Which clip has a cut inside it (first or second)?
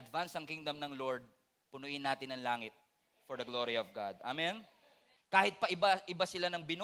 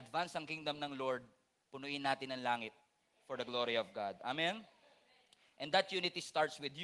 first